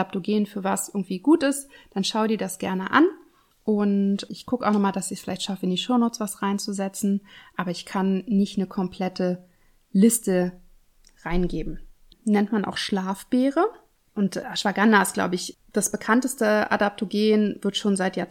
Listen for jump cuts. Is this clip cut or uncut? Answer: cut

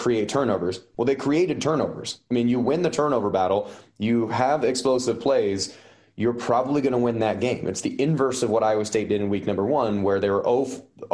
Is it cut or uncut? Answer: uncut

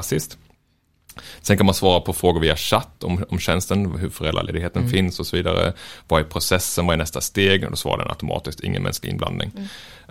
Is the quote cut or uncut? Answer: uncut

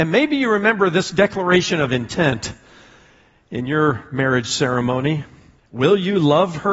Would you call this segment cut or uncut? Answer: cut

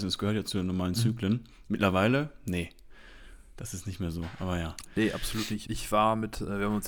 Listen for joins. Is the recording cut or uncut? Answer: cut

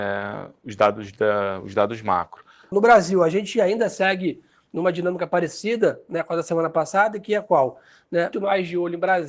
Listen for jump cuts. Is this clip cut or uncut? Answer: cut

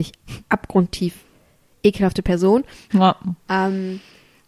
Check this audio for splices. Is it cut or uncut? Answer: cut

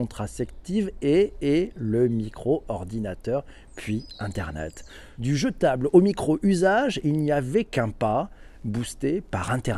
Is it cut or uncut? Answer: cut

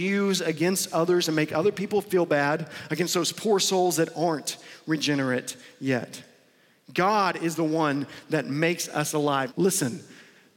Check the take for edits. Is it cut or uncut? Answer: cut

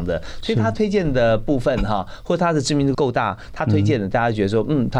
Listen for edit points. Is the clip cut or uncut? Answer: cut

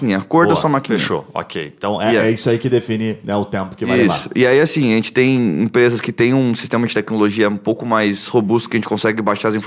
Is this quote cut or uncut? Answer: uncut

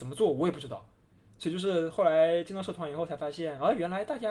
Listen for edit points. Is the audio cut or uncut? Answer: uncut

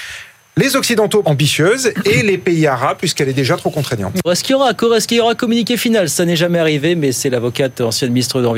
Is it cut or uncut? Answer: cut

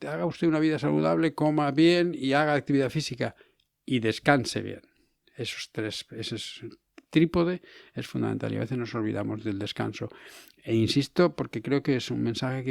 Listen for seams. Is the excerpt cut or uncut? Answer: uncut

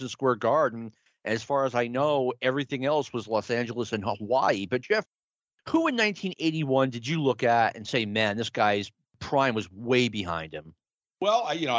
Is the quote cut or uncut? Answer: uncut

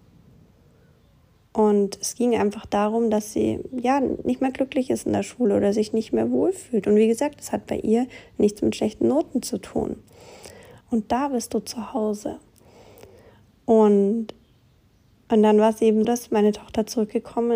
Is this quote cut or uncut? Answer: cut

